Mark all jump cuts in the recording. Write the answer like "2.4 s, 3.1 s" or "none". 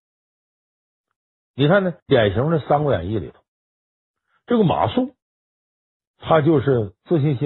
2.0 s